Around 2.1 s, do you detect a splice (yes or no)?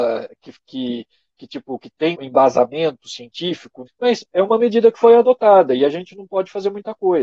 yes